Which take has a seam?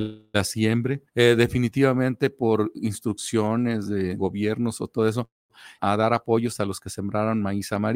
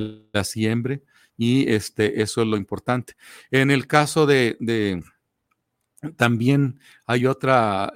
first; 3 cuts; at 1.1 s, 4.2 s, 5.8 s

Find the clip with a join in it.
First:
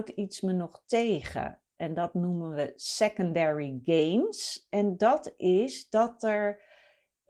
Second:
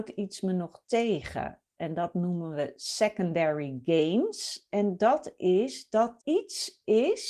second; 1 cut; at 6.2 s

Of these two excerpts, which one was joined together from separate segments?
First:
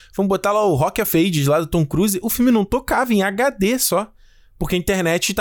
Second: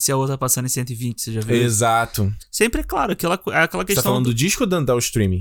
second; 1 cut; at 2.4 s

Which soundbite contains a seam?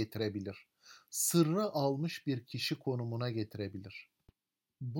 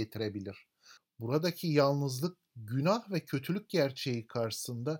second; 1 cut; at 1.0 s

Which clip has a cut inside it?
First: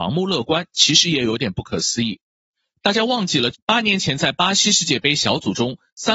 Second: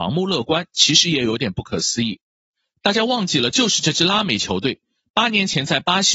first; 1 cut; at 3.5 s

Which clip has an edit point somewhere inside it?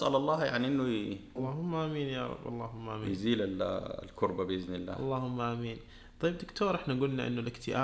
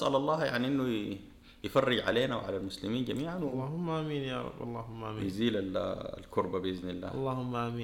first; 1 cut; at 1.4 s

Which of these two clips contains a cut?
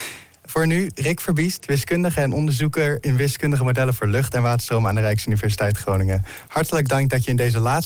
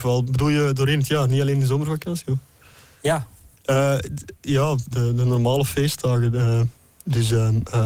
second; 1 cut; at 4.9 s

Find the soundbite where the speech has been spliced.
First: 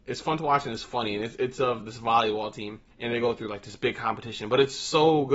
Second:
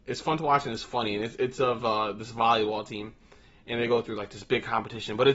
first; 2 cuts; at 1.8 s, 2.9 s

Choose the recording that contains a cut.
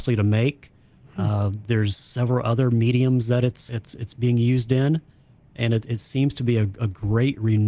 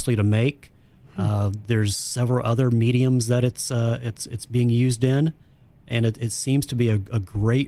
first; 1 cut; at 3.7 s

